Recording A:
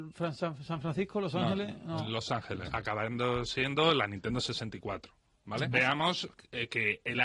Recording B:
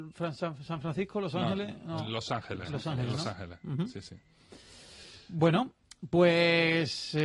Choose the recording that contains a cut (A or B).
A